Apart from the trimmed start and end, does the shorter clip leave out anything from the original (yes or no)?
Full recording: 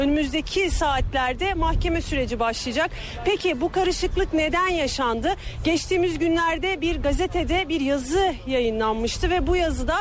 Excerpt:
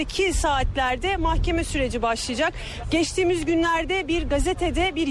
yes